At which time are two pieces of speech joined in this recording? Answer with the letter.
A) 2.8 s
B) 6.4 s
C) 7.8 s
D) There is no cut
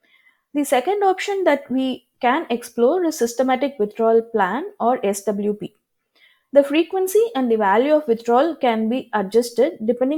B